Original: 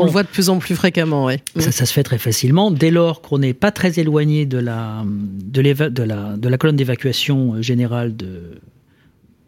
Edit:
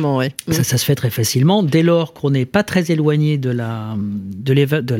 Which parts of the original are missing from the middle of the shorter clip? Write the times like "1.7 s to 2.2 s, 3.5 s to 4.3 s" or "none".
none